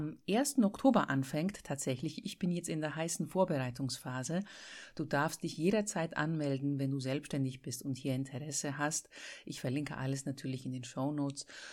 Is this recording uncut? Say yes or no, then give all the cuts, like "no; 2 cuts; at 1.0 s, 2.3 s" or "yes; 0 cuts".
yes; 0 cuts